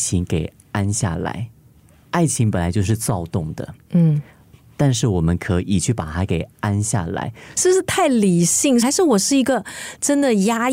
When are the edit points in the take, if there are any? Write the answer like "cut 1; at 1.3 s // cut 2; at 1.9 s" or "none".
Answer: cut 1; at 7.6 s // cut 2; at 8.8 s